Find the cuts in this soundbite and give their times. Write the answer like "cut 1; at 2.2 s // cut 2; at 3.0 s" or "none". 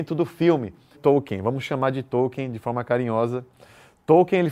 cut 1; at 0.9 s